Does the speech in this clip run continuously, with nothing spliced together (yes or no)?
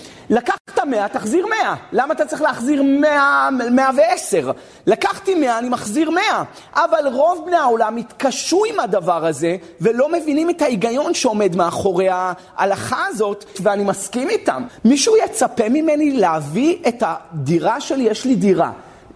no